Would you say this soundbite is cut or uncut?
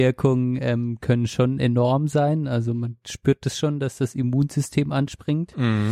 uncut